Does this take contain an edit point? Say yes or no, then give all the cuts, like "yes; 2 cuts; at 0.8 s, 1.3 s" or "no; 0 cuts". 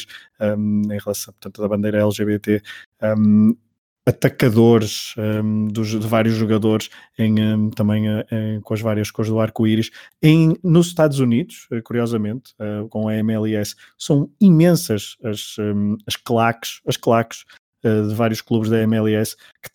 yes; 1 cut; at 8.6 s